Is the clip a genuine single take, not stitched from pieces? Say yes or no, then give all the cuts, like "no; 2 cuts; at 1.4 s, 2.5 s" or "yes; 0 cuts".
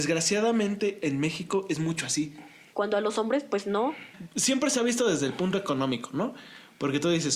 no; 1 cut; at 2.7 s